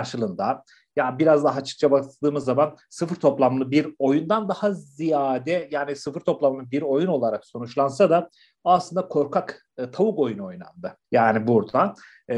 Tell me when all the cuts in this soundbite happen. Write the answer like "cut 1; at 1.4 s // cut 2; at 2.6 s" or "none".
cut 1; at 11.0 s